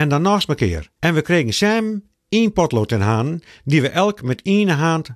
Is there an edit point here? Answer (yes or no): yes